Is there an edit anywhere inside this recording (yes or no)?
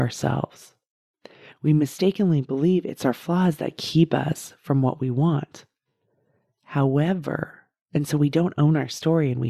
no